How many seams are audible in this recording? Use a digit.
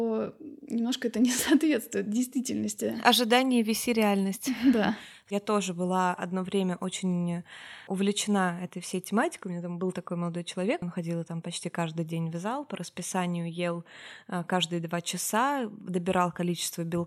1